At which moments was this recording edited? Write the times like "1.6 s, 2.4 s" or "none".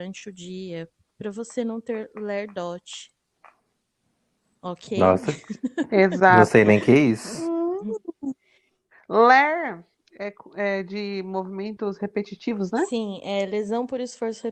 none

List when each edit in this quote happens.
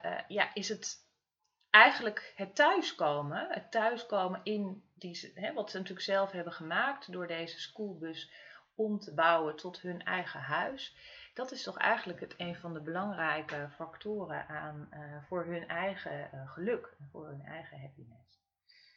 none

